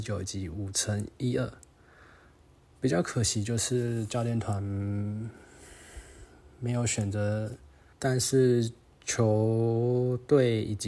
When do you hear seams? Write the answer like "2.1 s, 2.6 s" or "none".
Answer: 7.9 s